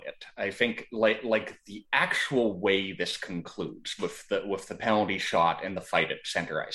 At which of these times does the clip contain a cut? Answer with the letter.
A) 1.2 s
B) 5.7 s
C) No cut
B